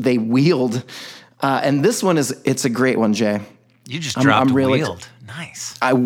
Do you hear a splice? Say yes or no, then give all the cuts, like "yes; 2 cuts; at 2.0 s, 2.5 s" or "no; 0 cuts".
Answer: no; 0 cuts